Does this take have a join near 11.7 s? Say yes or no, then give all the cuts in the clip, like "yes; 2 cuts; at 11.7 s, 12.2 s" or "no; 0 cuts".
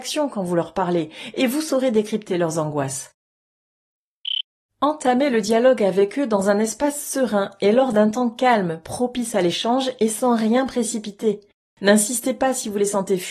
no; 1 cut; at 4.7 s